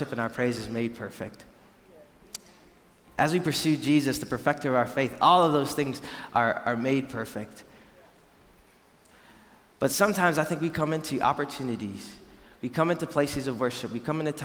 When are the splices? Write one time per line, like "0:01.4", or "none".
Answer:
none